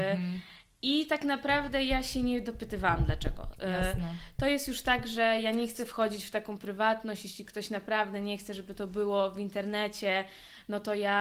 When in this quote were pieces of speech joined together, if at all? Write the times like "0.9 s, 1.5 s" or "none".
none